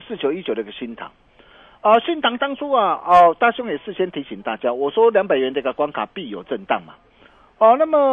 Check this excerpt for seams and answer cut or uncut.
uncut